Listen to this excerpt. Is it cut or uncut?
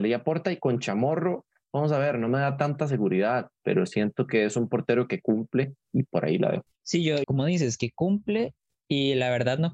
cut